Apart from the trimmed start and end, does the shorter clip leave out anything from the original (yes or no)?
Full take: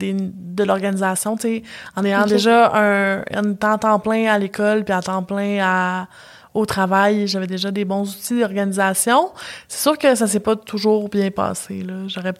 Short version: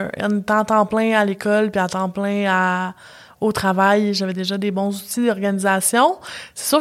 no